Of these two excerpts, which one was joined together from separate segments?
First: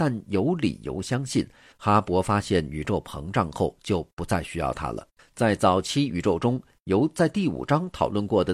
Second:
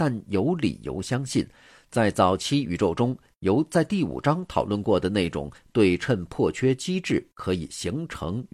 first; 2 cuts; at 1.7 s, 5.2 s

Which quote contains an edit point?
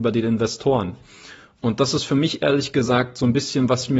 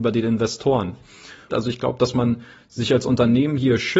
second; 1 cut; at 1.5 s

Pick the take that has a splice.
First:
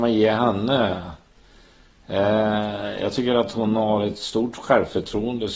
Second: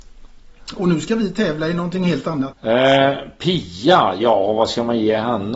second; 1 cut; at 2.5 s

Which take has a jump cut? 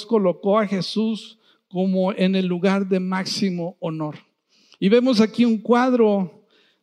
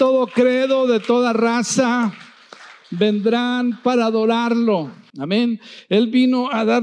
second; 1 cut; at 5.1 s

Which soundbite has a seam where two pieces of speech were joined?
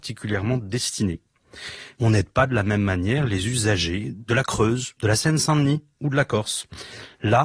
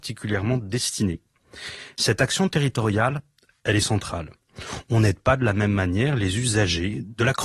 first; 2 cuts; at 1.9 s, 4.9 s

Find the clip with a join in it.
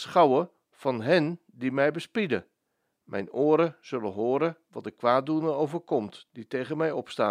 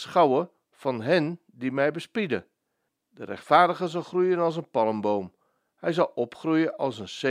second; 1 cut; at 2.9 s

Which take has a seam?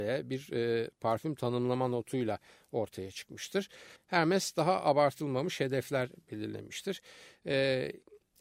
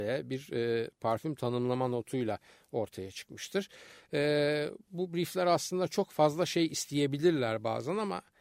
first; 1 cut; at 4.0 s

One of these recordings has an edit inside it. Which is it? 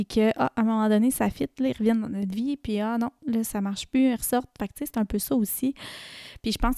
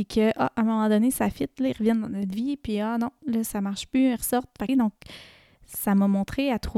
second; 1 cut; at 4.7 s

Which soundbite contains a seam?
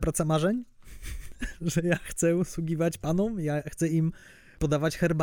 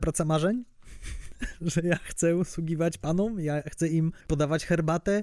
second; 1 cut; at 4.2 s

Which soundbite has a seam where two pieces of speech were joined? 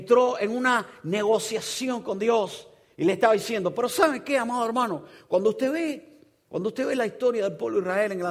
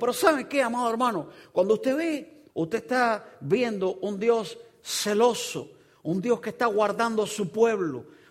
second; 1 cut; at 2.5 s

